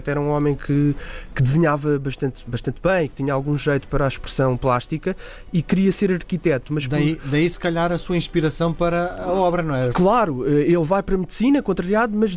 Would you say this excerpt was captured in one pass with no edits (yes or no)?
no